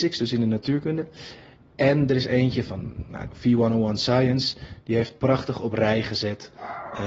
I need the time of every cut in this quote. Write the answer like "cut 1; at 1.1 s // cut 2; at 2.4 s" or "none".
cut 1; at 3.3 s